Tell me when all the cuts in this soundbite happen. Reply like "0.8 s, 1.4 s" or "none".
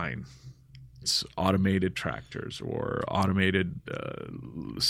1.0 s